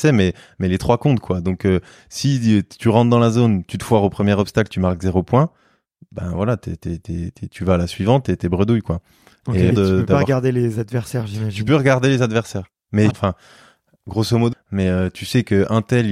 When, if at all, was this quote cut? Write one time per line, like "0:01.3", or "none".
0:09.7
0:13.1
0:14.5